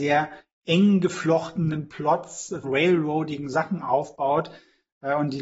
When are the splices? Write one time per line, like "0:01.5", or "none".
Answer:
0:02.6